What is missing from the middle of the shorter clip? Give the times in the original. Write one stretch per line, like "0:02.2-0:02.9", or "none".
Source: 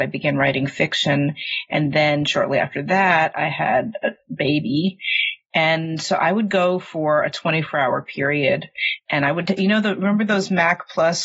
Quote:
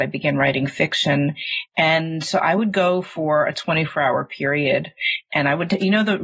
0:01.7-0:05.4